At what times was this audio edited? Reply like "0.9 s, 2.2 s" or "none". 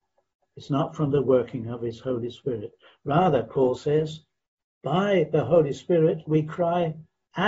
none